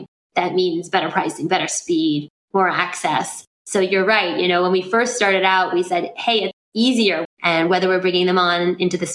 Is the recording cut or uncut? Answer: cut